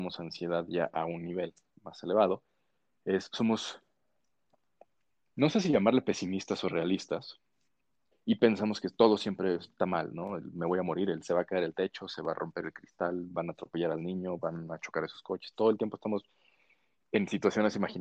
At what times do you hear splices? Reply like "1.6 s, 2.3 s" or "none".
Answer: 8.1 s